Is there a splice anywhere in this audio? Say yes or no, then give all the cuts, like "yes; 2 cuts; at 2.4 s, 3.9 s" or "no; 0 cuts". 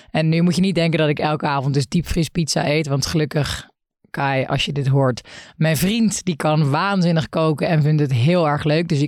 no; 0 cuts